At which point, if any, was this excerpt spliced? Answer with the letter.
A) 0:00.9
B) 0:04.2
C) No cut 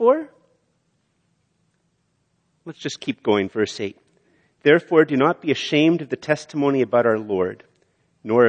C